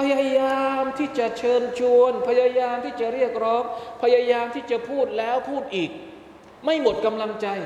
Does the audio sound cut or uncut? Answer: cut